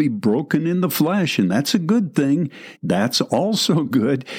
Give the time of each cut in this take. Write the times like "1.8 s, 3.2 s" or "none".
2.8 s